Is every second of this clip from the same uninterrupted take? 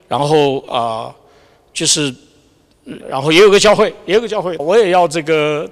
no; 2 cuts; at 3.0 s, 4.6 s

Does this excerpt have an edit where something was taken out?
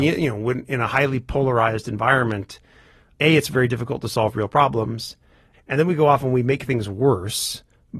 yes; 1 cut; at 5.5 s

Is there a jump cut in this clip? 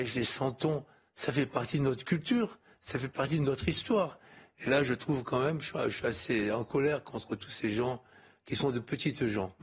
no; 0 cuts

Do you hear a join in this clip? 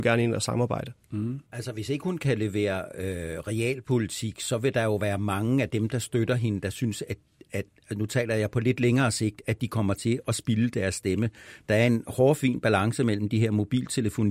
yes; 1 cut; at 1.5 s

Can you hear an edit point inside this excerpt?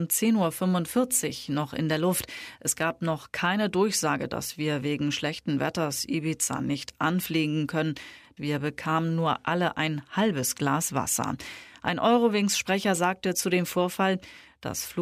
yes; 1 cut; at 8.4 s

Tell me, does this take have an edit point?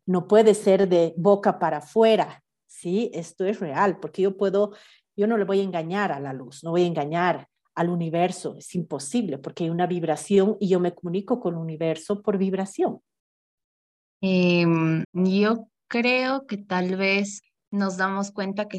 yes; 1 cut; at 15.0 s

